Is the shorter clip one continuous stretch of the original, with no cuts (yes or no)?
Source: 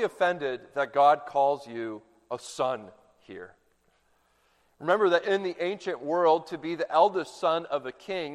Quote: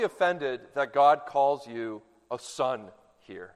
yes